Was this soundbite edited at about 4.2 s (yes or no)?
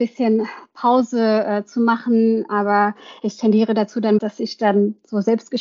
yes